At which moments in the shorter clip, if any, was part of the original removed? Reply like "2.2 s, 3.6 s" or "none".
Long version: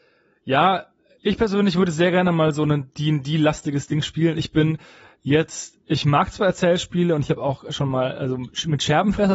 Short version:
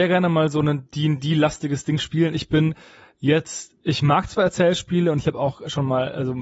none